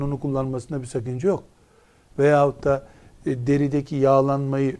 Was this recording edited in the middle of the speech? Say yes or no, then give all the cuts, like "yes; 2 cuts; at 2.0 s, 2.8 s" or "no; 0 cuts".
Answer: no; 0 cuts